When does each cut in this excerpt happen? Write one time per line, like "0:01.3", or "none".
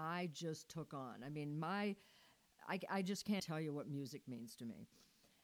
0:03.4